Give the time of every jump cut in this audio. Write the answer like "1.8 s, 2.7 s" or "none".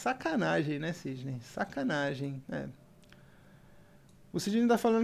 2.4 s